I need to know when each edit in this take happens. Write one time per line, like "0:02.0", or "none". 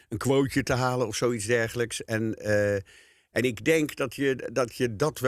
none